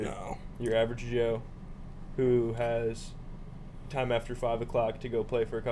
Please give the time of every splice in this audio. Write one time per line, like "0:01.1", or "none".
none